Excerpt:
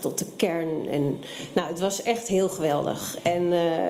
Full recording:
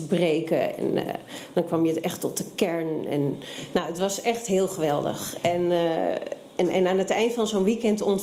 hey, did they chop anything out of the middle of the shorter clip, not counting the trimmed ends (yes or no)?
no